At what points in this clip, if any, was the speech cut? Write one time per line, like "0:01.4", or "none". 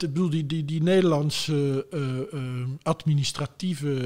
none